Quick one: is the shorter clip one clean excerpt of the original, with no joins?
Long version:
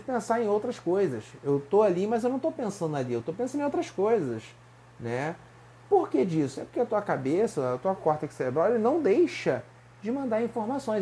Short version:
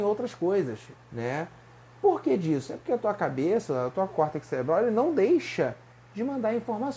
no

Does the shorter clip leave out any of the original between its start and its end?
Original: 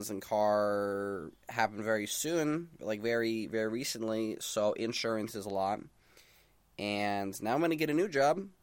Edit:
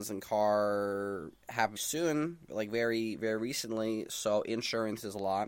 yes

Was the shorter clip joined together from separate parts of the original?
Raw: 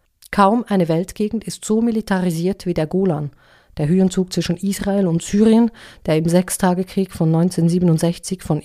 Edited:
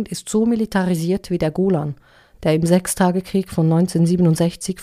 yes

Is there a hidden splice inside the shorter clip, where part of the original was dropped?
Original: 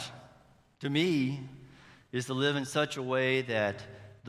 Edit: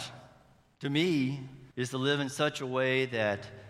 yes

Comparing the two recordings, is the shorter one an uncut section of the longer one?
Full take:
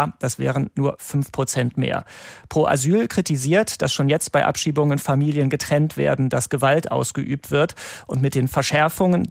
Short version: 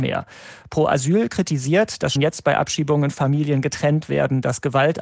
no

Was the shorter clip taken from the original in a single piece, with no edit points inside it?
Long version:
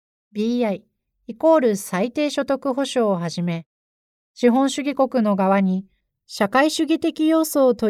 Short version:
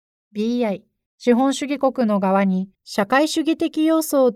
no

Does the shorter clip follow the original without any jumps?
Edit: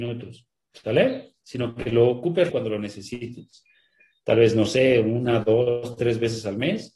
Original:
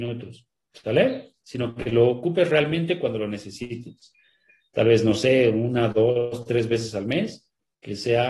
no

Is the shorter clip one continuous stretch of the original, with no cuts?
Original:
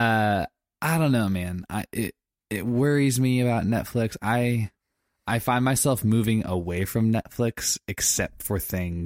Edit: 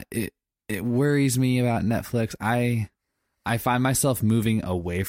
yes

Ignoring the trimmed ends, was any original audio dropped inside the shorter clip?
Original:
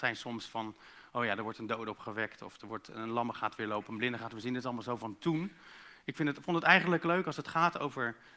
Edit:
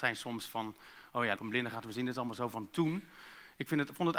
yes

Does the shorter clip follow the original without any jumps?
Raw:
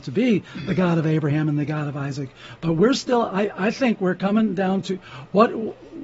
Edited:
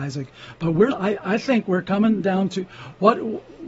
no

